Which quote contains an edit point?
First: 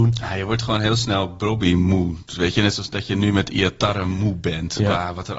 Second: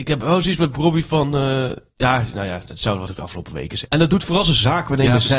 second; 1 cut; at 3.9 s

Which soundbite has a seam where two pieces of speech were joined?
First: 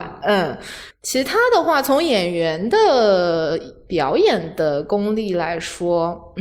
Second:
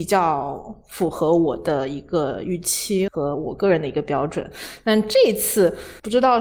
second; 1 cut; at 3.1 s

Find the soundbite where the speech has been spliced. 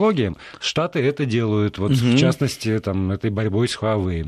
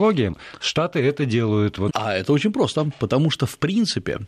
second; 1 cut; at 1.9 s

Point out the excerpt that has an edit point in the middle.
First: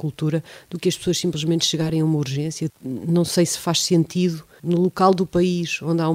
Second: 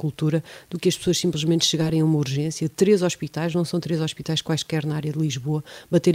first; 2 cuts; at 2.7 s, 4.6 s

